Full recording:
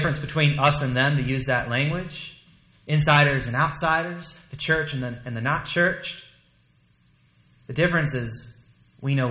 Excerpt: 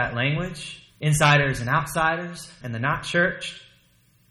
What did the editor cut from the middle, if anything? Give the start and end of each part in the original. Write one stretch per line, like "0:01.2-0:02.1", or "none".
0:02.4-0:02.8
0:04.5-0:05.2